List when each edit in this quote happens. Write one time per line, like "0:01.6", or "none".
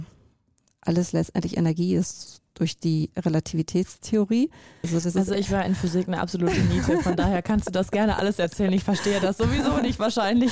0:04.8